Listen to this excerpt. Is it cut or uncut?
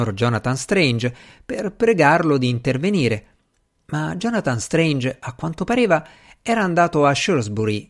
uncut